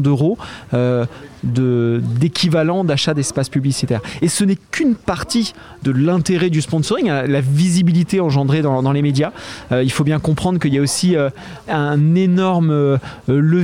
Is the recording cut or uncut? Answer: uncut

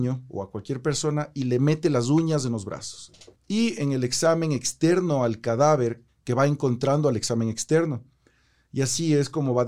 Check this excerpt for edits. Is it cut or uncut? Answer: cut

